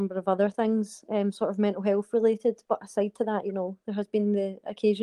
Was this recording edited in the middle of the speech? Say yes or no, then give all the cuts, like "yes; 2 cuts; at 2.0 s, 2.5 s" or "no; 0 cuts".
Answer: no; 0 cuts